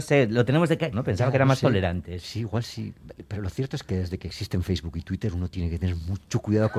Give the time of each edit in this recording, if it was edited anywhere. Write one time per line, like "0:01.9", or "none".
0:00.9

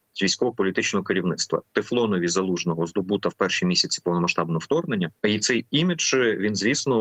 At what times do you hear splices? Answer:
0:05.2

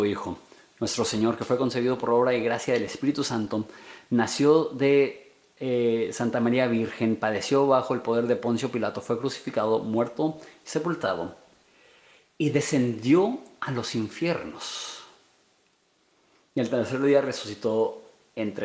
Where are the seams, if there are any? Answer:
none

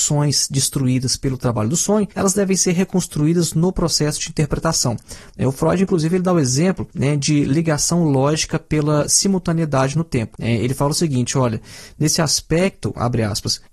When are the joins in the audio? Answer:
none

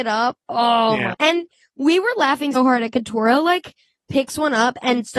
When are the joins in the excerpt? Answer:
0:01.1
0:02.5

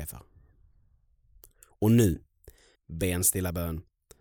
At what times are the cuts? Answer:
0:02.7

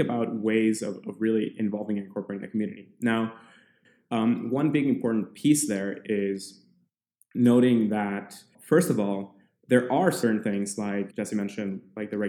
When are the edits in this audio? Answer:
none

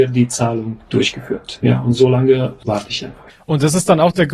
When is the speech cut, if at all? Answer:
none

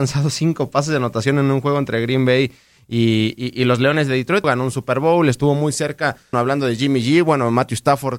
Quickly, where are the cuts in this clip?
0:04.4
0:06.3

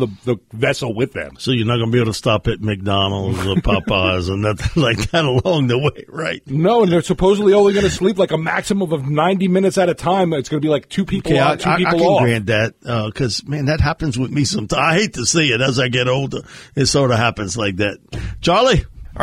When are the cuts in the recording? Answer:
none

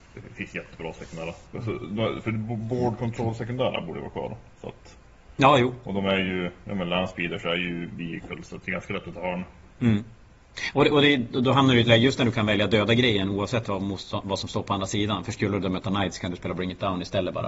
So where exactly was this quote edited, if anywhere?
none

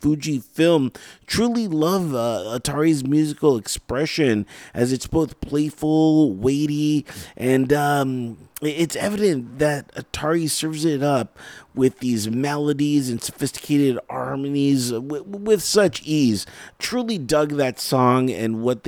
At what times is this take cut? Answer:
none

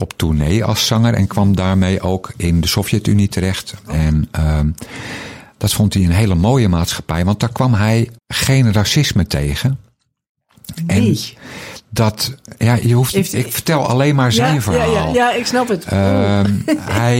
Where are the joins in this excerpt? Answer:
0:08.2

